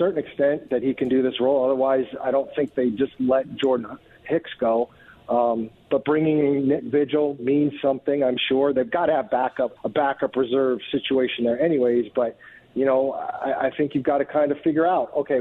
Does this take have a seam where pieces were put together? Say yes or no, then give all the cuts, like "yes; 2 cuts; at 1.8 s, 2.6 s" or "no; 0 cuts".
yes; 1 cut; at 9.8 s